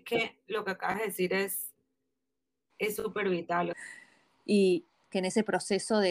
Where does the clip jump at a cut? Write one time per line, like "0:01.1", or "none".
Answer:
0:03.7
0:05.0

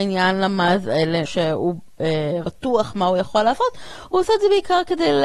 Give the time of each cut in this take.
0:01.3
0:02.4

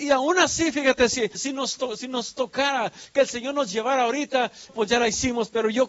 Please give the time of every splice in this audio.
0:01.3
0:04.7

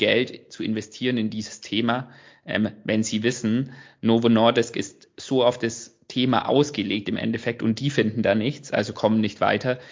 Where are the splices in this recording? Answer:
none

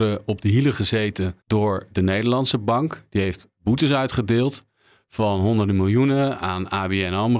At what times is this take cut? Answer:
0:01.4

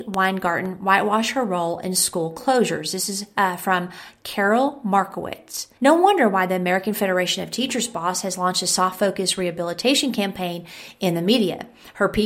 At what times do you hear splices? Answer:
0:05.8

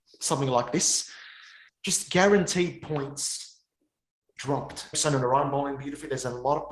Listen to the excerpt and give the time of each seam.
0:01.7
0:04.9

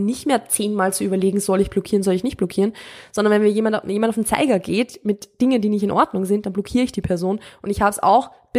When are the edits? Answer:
none

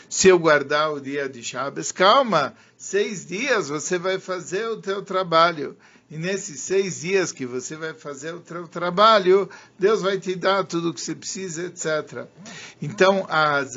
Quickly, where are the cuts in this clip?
none

